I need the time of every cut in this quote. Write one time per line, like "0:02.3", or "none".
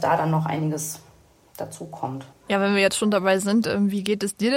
0:02.3